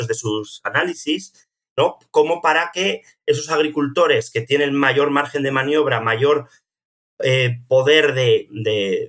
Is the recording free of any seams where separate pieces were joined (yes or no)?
yes